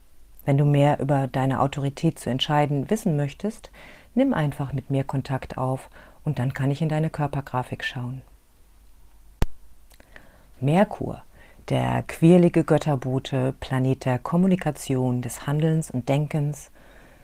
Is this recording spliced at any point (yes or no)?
yes